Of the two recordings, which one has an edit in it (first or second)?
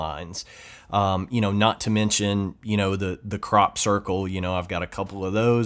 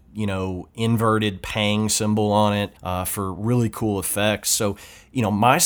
second